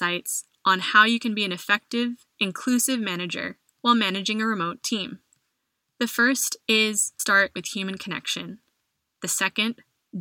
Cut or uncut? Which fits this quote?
cut